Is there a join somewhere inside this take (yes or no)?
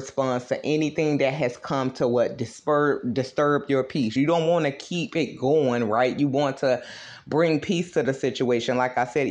no